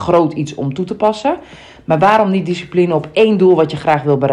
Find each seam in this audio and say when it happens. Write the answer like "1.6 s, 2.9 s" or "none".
none